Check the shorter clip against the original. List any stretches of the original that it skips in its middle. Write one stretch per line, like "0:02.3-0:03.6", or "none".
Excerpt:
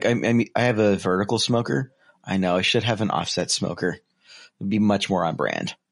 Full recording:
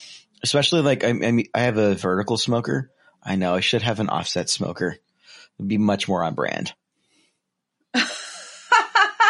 none